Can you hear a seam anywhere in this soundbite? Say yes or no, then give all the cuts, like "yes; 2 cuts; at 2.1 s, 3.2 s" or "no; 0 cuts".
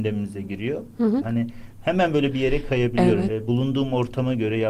yes; 2 cuts; at 1.2 s, 3.3 s